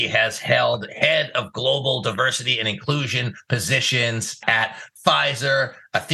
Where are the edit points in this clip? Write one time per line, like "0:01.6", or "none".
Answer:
none